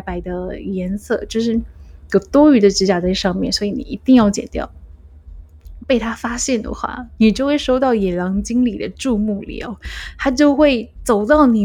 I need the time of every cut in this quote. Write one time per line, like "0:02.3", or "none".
0:05.8
0:07.2